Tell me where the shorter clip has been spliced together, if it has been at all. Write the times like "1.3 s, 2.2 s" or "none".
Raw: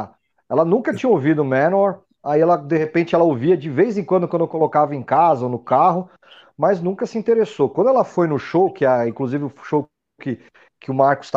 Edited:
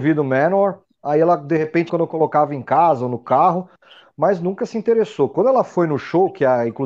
1.9 s